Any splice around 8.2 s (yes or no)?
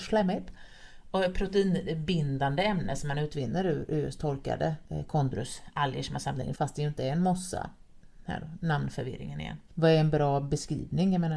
no